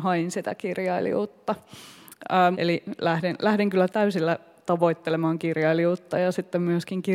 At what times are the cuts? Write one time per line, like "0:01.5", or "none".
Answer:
0:02.5
0:03.9